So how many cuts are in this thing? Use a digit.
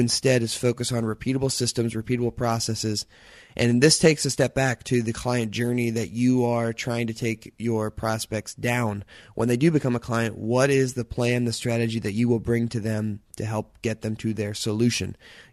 0